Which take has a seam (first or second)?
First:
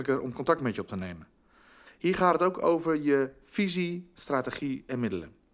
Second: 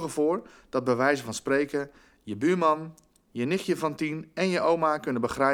first